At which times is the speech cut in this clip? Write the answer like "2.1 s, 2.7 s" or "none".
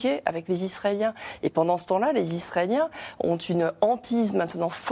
none